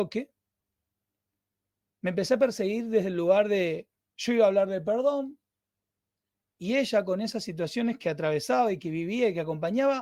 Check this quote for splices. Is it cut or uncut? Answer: uncut